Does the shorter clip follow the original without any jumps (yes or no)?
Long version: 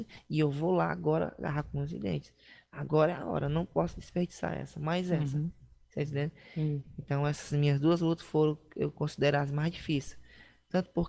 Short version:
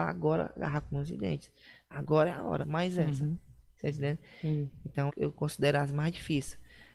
no